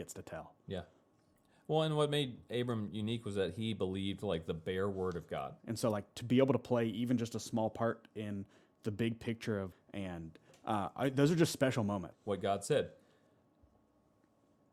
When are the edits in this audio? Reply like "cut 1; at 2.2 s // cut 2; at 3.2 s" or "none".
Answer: cut 1; at 5.6 s // cut 2; at 9.7 s // cut 3; at 12.1 s